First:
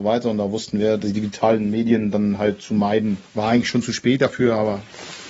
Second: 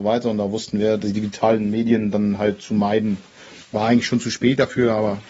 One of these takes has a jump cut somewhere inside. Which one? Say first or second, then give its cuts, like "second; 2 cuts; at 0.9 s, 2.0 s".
first; 1 cut; at 3.3 s